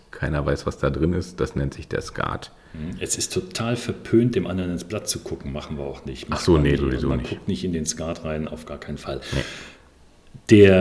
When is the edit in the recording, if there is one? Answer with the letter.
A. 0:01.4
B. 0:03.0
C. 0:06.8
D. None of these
C